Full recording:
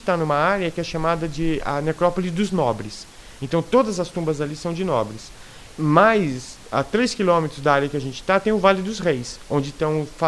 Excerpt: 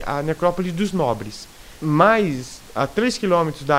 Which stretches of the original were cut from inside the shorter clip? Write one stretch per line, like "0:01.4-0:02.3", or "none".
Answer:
0:03.4-0:05.7